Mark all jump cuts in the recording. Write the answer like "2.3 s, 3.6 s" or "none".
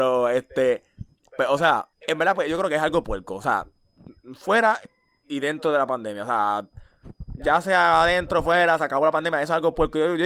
1.9 s